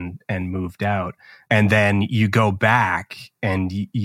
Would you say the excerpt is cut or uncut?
uncut